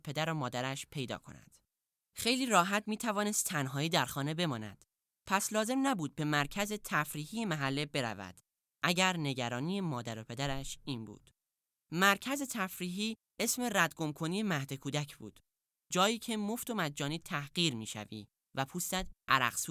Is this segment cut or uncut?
uncut